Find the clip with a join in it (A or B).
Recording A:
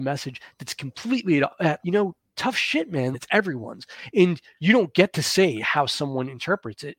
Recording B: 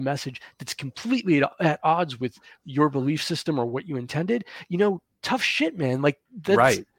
A